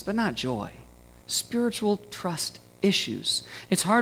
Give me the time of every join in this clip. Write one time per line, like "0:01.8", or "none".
0:01.2